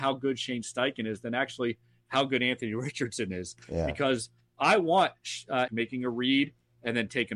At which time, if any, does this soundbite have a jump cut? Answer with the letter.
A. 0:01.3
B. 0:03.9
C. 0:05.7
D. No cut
C